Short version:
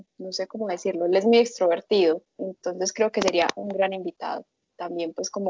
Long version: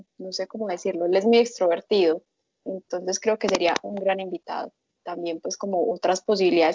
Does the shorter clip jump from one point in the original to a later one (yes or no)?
yes